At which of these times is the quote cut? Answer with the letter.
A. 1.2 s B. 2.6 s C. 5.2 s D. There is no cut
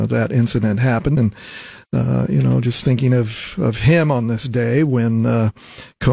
A